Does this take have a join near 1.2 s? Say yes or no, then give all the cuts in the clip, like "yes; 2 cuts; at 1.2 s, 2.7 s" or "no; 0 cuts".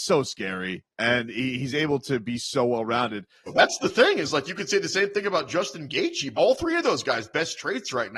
no; 2 cuts; at 3.5 s, 6.3 s